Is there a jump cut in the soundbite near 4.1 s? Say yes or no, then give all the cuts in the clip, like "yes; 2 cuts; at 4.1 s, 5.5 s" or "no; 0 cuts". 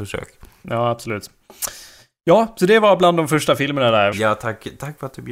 yes; 1 cut; at 4.1 s